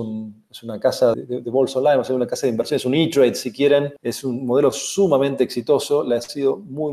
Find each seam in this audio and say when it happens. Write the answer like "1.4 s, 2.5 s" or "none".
1.1 s, 4.0 s